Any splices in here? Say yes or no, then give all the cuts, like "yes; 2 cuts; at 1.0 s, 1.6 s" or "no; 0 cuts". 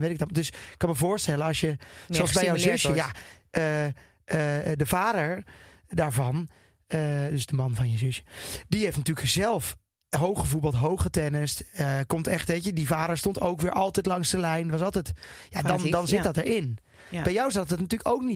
no; 0 cuts